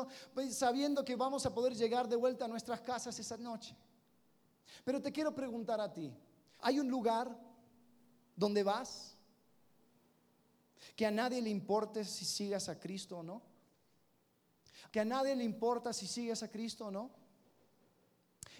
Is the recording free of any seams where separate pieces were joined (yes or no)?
no